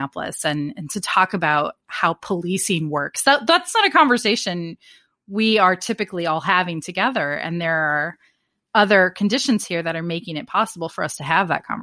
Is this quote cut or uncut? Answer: uncut